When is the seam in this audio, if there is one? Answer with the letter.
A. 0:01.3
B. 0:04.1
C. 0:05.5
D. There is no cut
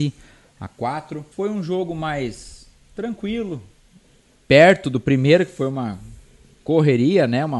A